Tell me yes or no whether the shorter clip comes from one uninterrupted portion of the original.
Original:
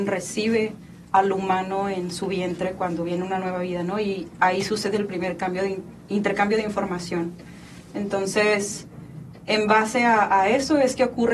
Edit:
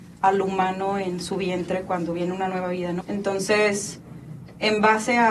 no